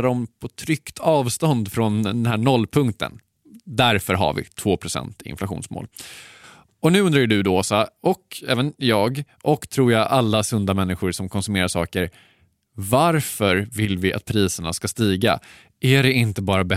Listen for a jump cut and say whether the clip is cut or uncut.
uncut